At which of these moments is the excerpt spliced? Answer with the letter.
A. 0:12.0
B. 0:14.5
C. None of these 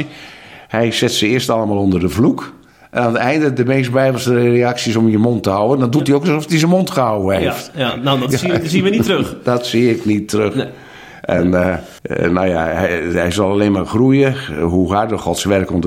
A